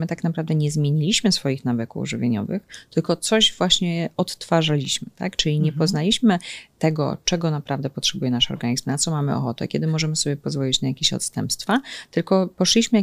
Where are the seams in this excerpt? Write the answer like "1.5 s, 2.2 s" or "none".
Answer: none